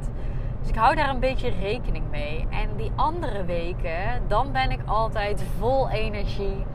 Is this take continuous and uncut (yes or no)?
yes